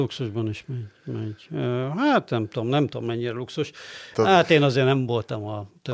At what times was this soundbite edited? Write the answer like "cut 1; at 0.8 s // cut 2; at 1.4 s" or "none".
cut 1; at 4.1 s